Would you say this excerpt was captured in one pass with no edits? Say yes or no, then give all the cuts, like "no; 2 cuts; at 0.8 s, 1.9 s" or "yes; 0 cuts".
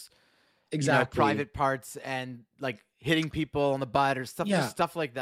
yes; 0 cuts